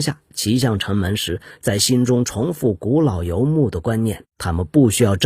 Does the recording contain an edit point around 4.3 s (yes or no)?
yes